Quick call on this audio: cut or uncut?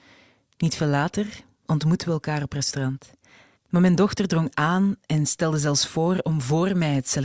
cut